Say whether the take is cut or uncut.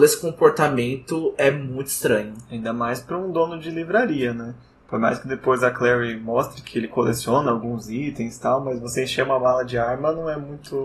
uncut